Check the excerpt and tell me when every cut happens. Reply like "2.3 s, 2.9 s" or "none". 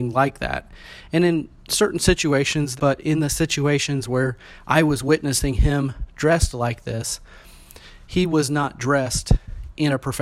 2.8 s